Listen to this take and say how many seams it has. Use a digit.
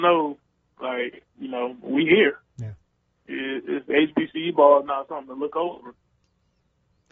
1